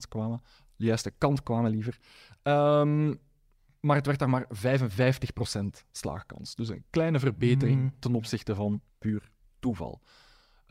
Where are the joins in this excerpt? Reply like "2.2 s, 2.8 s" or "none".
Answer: 8.9 s